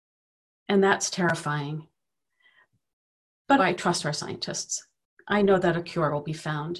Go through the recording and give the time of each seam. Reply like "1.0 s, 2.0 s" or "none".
3.6 s